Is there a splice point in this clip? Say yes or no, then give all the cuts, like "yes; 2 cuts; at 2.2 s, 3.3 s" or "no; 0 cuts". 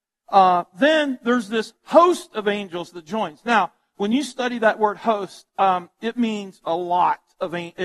no; 0 cuts